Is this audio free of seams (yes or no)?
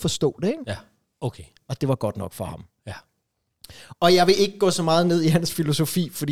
no